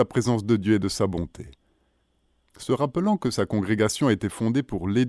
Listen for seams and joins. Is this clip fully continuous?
no; 1 cut; at 2.5 s

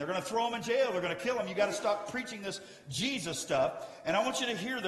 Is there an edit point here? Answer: no; 0 cuts

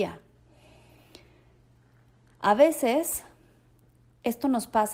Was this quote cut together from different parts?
no; 0 cuts

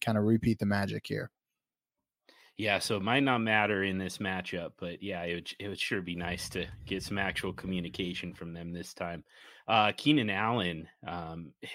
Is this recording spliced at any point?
no; 0 cuts

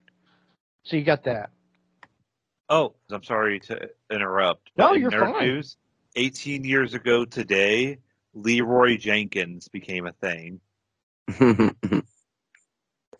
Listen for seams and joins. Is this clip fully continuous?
no; 1 cut; at 3.1 s

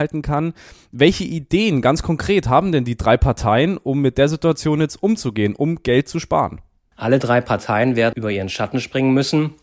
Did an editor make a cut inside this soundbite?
yes; 2 cuts; at 6.9 s, 8.1 s

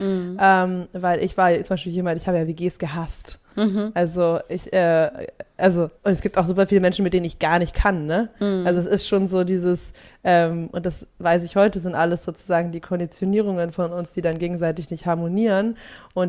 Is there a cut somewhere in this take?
yes; 1 cut; at 6.0 s

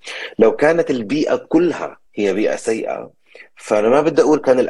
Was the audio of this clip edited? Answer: yes; 1 cut; at 2.1 s

